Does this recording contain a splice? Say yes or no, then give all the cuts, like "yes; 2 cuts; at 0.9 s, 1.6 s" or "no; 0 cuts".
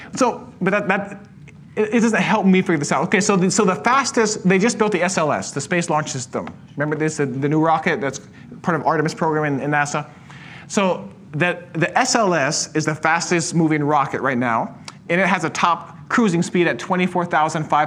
no; 0 cuts